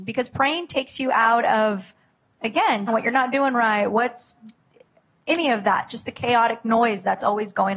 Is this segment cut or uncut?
cut